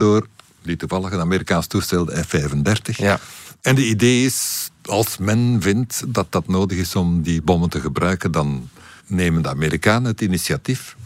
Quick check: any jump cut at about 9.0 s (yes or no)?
yes